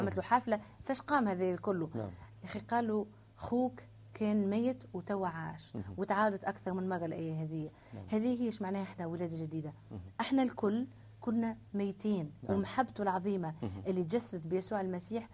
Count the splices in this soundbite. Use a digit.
1